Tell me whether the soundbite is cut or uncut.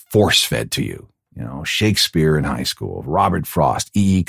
uncut